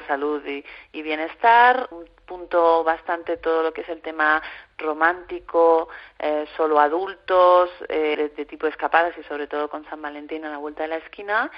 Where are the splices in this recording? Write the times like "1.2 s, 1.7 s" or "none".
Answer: 1.9 s, 8.1 s

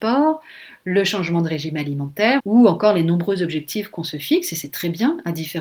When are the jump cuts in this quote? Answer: 2.4 s

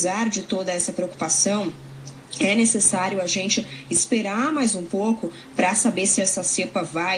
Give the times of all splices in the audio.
6.2 s

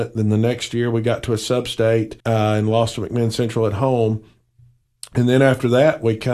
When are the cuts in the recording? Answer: 2.2 s

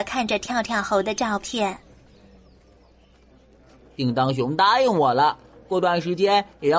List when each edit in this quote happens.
none

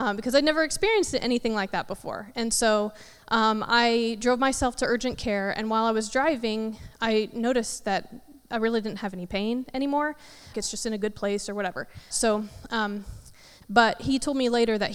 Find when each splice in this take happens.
10.5 s, 12.1 s, 13.6 s

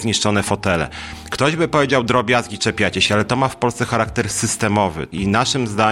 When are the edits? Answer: none

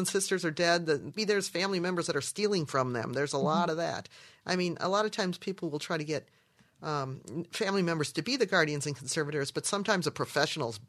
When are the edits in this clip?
1.2 s

